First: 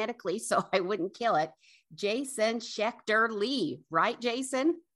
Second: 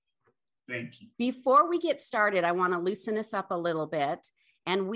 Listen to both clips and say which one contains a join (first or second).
second